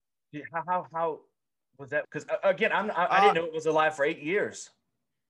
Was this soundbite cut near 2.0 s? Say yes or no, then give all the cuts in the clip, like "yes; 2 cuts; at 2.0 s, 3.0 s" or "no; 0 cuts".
yes; 1 cut; at 2.0 s